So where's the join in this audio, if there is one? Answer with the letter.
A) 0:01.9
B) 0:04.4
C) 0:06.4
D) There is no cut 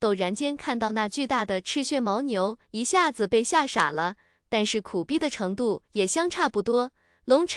B